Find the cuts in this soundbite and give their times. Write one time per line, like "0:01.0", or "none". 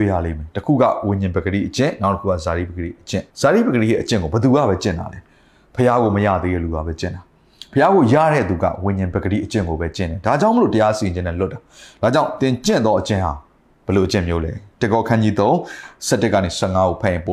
0:03.3